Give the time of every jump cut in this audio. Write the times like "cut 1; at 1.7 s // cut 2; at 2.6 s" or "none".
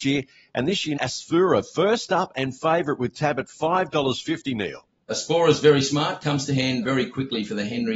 cut 1; at 1.0 s // cut 2; at 6.8 s